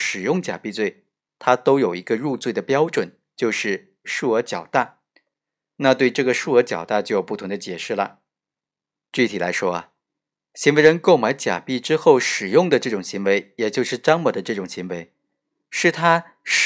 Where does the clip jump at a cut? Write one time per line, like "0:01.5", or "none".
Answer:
none